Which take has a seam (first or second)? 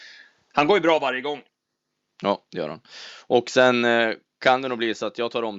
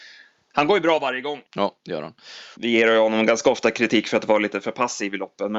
second